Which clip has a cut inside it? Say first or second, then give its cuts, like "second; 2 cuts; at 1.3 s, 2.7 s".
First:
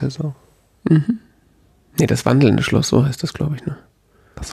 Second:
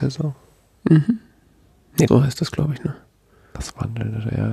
second; 1 cut; at 2.1 s